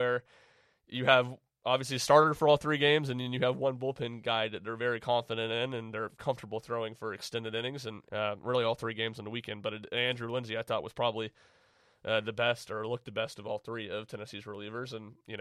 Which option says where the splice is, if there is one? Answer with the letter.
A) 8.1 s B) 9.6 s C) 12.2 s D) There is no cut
A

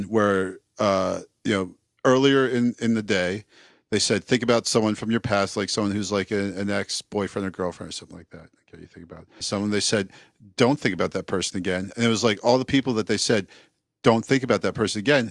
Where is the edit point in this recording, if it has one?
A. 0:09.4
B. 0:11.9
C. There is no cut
A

